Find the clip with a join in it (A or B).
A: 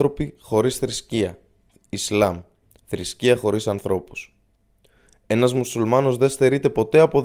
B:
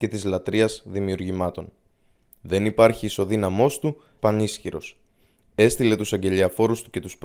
B